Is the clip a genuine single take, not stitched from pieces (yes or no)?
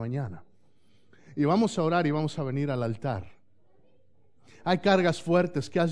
yes